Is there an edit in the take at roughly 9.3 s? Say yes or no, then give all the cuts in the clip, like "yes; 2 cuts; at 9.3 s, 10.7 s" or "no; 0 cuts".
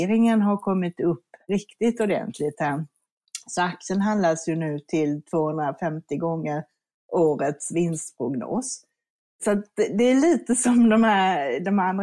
no; 0 cuts